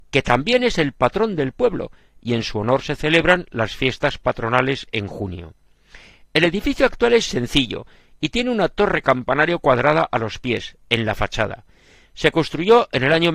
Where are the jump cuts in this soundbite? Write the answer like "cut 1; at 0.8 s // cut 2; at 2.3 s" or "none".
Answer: none

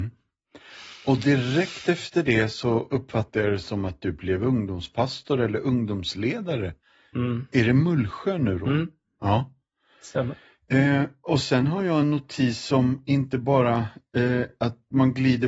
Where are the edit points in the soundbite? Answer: none

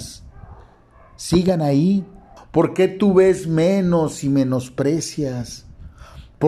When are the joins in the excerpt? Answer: cut 1; at 2.4 s

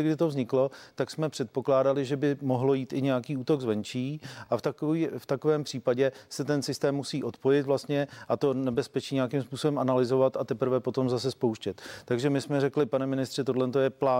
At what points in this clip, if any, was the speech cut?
none

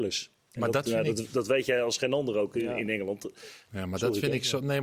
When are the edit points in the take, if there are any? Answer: cut 1; at 3.7 s

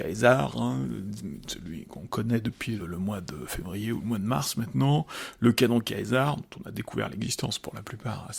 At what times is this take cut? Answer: cut 1; at 2.8 s

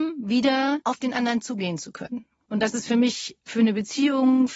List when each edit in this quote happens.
cut 1; at 2.5 s

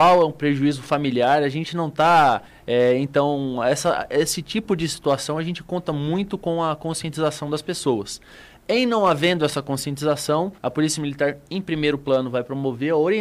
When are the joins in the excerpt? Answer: cut 1; at 2.5 s // cut 2; at 10.6 s

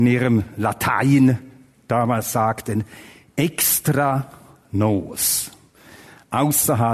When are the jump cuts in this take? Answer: none

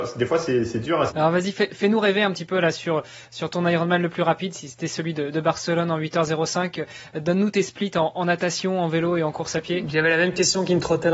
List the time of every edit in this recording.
cut 1; at 1.1 s

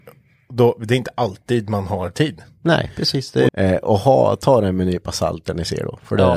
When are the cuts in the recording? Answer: cut 1; at 3.5 s

